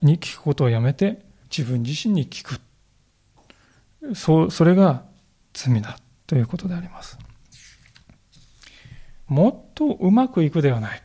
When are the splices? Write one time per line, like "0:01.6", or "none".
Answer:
0:01.4
0:09.3